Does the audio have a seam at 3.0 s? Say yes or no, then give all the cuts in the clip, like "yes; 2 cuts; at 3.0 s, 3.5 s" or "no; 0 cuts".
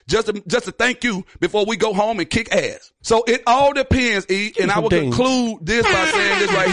yes; 1 cut; at 3.0 s